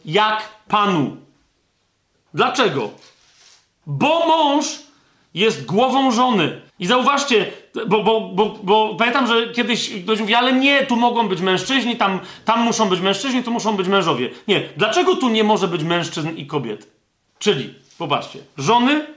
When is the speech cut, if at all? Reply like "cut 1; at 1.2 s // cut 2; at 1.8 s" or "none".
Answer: cut 1; at 2.1 s // cut 2; at 6.7 s // cut 3; at 17.3 s